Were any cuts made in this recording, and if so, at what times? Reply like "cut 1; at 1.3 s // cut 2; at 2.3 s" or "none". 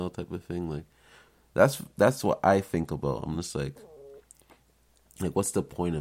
none